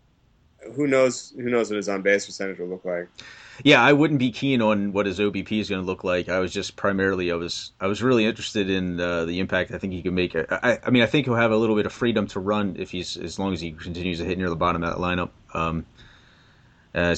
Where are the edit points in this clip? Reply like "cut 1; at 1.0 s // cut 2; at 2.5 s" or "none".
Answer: none